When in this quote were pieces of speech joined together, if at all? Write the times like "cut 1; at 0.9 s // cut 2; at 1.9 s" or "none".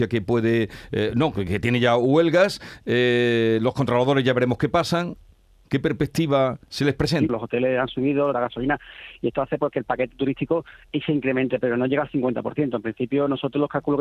cut 1; at 7.3 s // cut 2; at 8.3 s